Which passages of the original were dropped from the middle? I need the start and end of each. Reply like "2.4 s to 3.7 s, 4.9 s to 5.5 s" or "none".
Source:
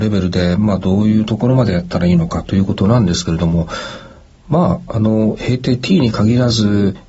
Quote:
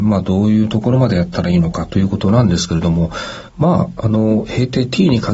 4.0 s to 4.4 s